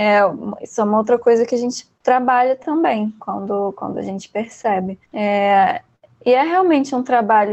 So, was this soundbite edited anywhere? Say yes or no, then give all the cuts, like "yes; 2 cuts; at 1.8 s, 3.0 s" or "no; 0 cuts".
yes; 1 cut; at 5.0 s